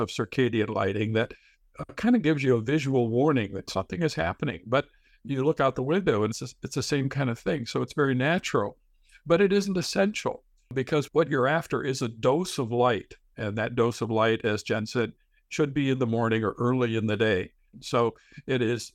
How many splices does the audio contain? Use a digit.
1